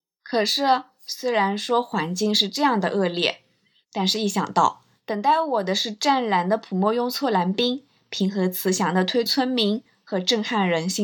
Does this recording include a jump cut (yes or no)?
yes